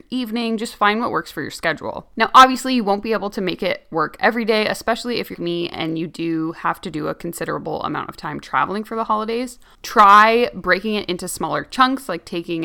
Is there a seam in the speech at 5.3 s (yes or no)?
yes